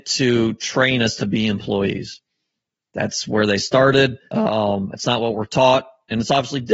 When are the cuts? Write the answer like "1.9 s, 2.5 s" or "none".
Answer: 4.3 s